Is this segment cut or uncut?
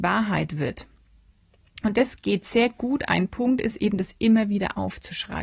uncut